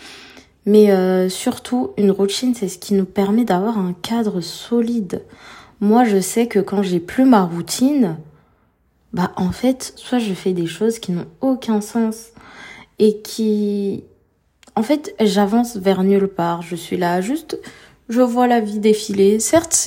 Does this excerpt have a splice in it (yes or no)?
yes